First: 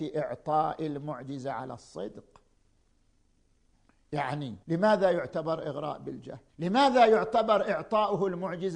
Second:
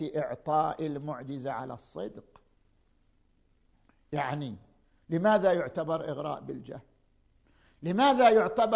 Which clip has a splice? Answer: first; 2 cuts; at 4.6 s, 6.5 s

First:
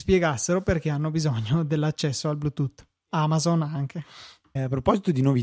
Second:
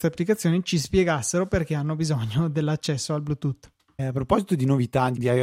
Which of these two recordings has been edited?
second; 1 cut; at 3.8 s

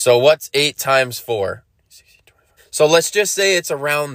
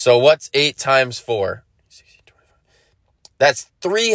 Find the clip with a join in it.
first; 1 cut; at 2.6 s

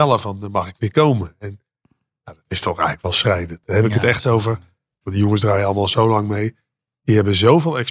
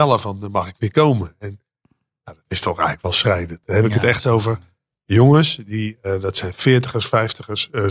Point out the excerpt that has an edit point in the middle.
first; 1 cut; at 5.0 s

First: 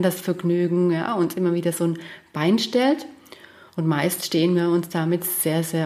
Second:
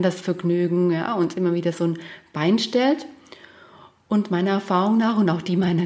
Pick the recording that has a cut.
first; 1 cut; at 3.7 s

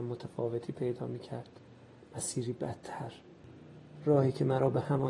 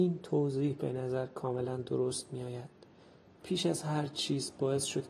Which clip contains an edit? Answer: second; 1 cut; at 3.4 s

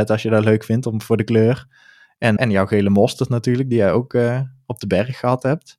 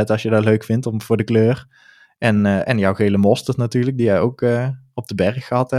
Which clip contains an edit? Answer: first; 1 cut; at 2.4 s

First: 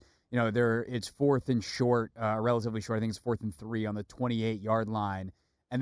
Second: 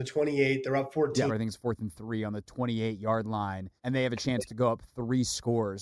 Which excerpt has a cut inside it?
second; 2 cuts; at 1.3 s, 3.8 s

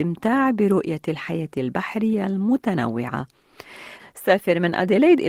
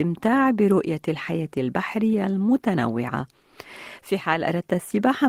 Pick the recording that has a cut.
first; 1 cut; at 4.0 s

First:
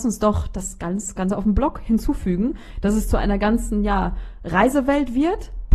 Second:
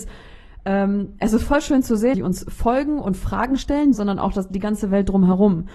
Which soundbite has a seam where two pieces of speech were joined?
second; 2 cuts; at 2.1 s, 3.9 s

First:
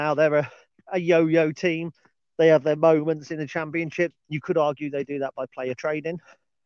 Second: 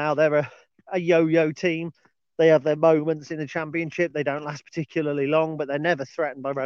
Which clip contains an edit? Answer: first; 1 cut; at 4.1 s

